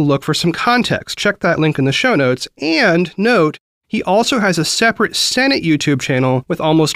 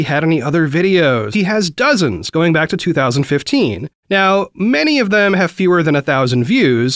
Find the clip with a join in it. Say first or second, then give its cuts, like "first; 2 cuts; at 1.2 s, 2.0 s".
second; 2 cuts; at 1.3 s, 4.0 s